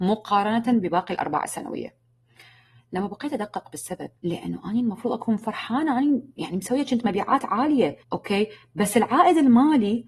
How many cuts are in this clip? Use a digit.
2